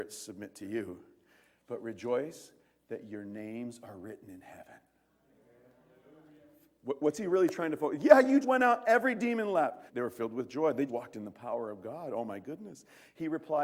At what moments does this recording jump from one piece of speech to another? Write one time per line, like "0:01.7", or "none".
0:08.4
0:09.9
0:10.9